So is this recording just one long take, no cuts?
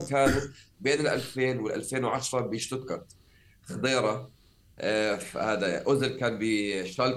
yes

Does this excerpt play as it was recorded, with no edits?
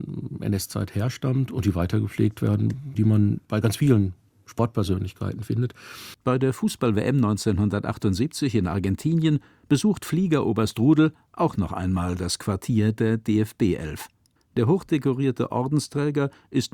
no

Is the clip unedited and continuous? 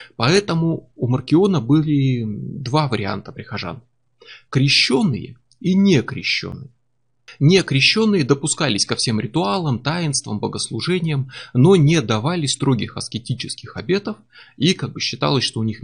yes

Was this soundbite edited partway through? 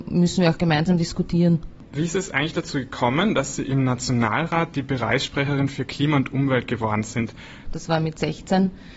yes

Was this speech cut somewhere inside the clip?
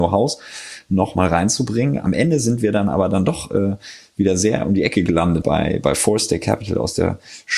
yes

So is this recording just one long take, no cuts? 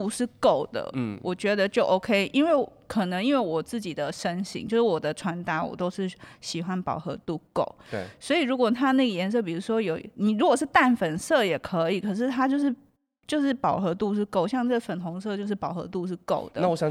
yes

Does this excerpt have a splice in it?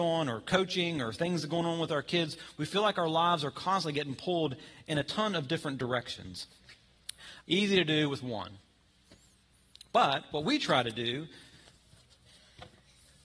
yes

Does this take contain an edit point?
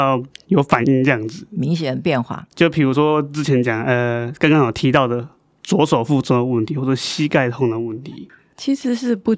no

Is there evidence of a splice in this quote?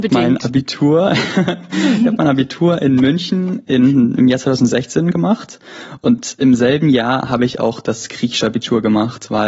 no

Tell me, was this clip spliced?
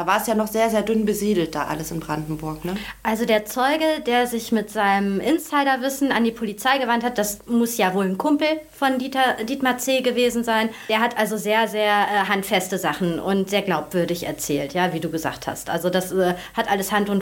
no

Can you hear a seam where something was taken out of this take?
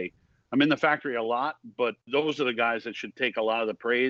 yes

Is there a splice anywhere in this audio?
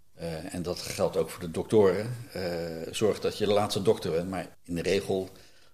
yes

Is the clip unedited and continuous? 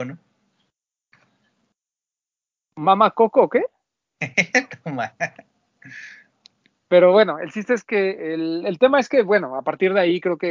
yes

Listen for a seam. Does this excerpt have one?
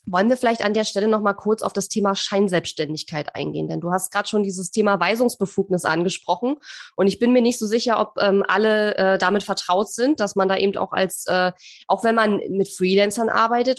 no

